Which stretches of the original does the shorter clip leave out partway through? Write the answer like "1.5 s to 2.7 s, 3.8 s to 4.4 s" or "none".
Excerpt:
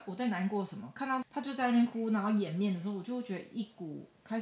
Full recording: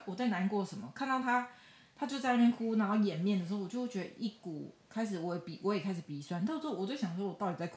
1.2 s to 1.9 s